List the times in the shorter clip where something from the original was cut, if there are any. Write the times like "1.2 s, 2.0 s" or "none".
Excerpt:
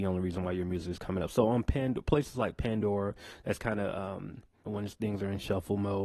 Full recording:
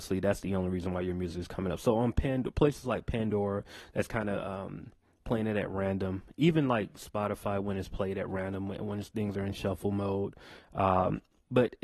4.7 s